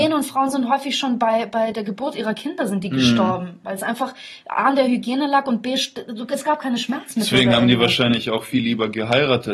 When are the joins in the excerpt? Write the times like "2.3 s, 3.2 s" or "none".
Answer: none

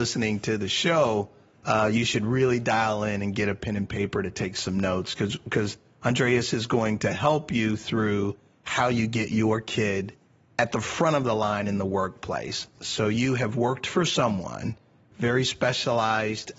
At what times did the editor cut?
12.7 s

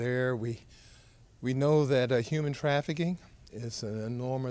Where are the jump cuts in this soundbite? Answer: 3.5 s

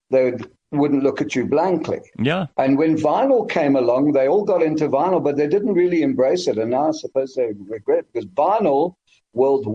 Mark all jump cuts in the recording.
2.1 s

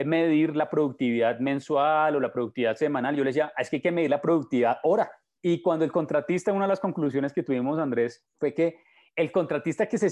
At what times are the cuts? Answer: 5.4 s

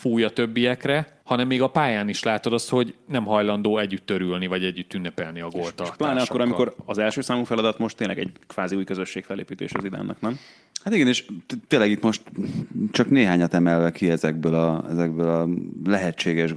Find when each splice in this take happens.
1.2 s

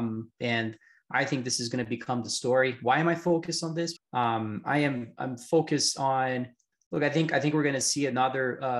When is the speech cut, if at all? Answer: 4.0 s

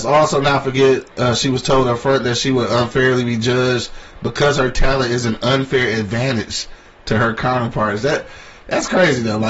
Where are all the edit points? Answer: none

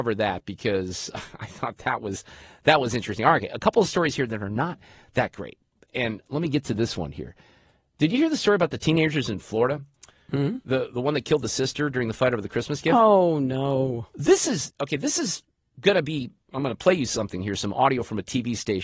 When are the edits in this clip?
14.7 s

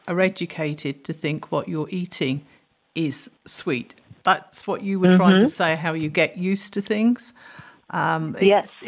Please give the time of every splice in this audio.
3.4 s

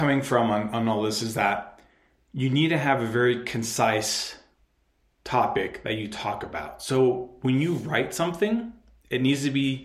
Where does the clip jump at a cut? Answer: none

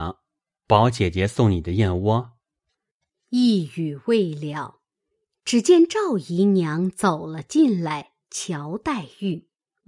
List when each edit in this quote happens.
none

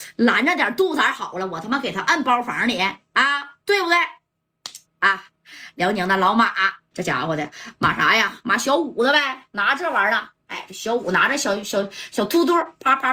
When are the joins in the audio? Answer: 4.8 s, 6.9 s

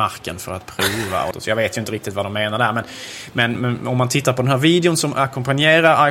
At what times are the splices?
1.3 s, 3.5 s

